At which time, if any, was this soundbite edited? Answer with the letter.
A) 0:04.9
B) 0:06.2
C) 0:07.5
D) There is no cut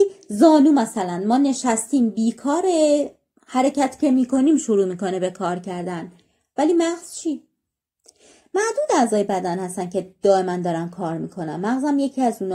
D